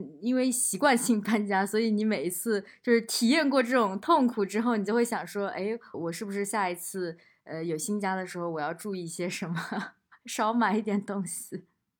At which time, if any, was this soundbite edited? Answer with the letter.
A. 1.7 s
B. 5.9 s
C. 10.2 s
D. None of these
B